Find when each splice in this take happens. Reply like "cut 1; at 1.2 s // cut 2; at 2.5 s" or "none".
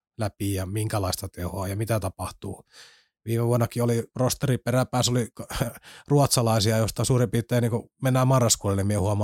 cut 1; at 7.9 s